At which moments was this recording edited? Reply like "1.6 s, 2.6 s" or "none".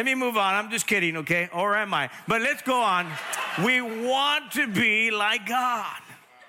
none